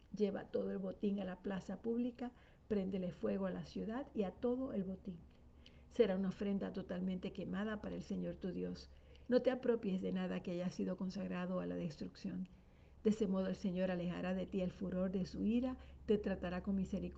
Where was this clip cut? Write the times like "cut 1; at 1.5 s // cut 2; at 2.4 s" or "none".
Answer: cut 1; at 9.3 s